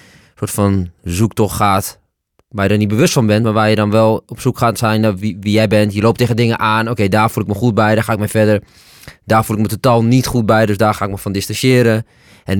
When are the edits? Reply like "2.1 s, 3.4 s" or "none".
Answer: none